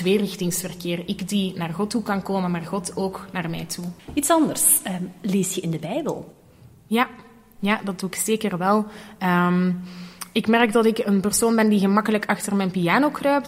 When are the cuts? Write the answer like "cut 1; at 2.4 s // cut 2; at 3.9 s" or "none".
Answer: none